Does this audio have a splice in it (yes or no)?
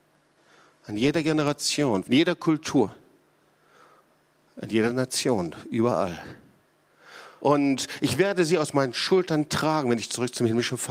yes